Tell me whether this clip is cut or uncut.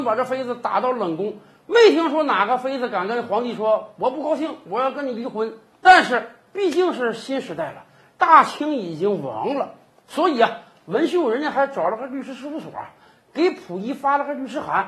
uncut